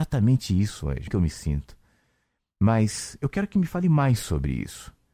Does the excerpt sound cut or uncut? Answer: cut